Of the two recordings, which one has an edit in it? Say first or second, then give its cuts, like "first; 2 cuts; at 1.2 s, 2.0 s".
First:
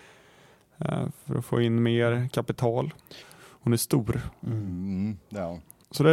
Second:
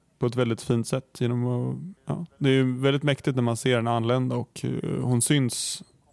first; 1 cut; at 3.2 s